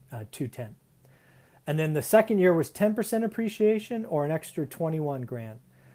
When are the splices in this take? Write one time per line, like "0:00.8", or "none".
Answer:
none